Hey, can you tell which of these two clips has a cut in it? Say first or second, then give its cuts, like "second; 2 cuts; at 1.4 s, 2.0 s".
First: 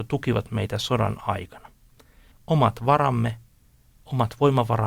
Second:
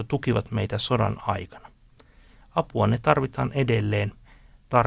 first; 1 cut; at 2.3 s